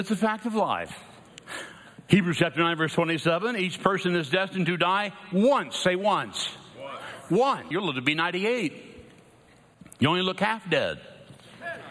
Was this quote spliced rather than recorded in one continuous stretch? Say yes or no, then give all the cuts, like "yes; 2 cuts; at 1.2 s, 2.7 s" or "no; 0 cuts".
yes; 1 cut; at 7.7 s